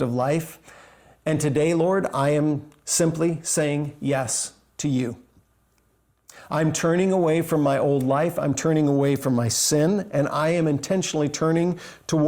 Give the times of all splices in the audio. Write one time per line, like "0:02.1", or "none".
none